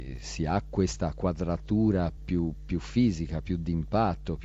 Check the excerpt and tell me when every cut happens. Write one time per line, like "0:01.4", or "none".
0:02.2